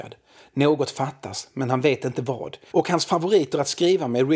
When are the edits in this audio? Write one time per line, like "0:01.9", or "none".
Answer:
0:02.7